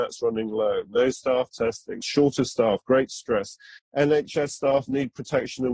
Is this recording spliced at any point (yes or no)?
yes